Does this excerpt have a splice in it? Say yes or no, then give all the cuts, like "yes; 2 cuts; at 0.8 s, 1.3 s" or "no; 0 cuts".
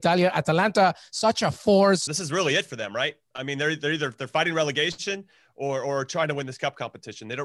yes; 1 cut; at 2.1 s